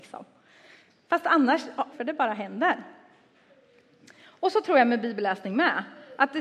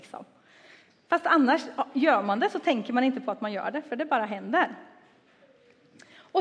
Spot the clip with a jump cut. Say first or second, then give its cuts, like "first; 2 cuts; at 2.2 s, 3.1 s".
first; 1 cut; at 1.9 s